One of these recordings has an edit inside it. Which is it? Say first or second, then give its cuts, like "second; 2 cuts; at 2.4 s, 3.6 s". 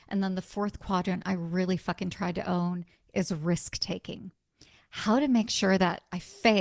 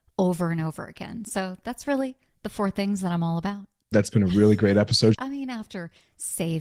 second; 2 cuts; at 3.9 s, 5.1 s